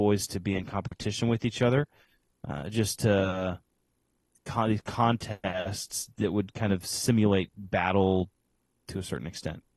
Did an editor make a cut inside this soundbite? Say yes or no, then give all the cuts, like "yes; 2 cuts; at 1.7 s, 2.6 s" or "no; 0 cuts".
no; 0 cuts